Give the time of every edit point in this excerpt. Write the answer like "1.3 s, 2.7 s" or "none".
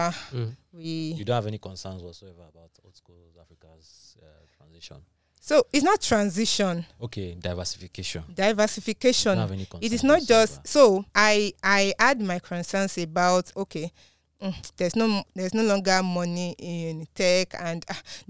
11.1 s, 13.5 s